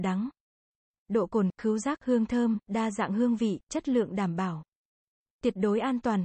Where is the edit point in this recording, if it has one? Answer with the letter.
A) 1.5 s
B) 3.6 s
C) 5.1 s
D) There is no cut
B